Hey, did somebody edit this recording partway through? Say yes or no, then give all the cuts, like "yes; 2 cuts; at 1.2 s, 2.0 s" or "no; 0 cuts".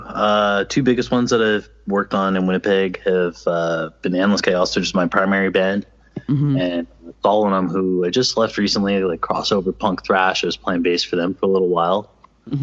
no; 0 cuts